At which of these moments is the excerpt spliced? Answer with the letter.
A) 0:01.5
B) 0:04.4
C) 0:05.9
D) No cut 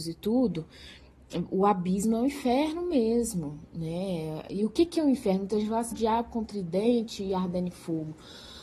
C